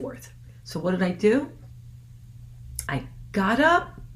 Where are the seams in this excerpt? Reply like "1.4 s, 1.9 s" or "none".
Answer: 2.9 s

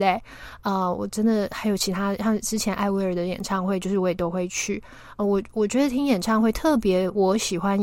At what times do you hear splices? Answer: none

